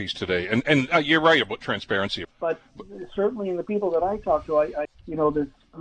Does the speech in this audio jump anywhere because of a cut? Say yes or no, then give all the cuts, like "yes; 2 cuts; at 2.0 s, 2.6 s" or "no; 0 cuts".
yes; 2 cuts; at 2.2 s, 4.9 s